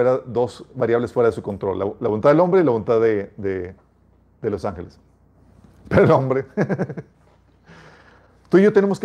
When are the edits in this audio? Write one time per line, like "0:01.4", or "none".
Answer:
none